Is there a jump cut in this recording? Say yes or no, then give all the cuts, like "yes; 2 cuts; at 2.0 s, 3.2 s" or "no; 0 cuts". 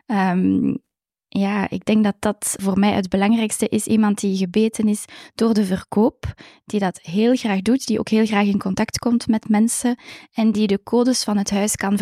yes; 1 cut; at 2.6 s